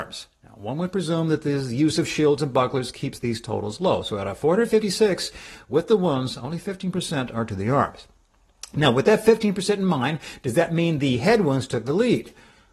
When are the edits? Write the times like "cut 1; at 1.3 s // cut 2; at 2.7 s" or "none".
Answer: none